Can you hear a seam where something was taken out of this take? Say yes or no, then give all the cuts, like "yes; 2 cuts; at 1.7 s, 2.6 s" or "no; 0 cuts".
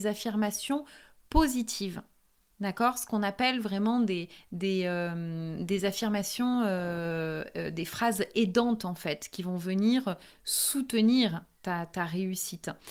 no; 0 cuts